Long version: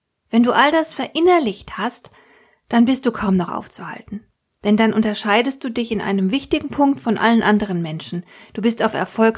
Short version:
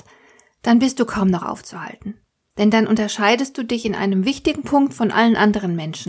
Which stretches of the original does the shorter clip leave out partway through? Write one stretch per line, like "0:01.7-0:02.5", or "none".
none